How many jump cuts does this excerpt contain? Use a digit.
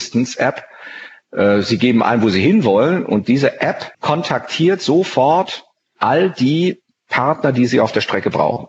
1